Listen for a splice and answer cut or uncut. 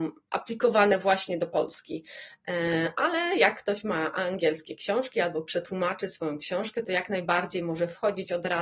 uncut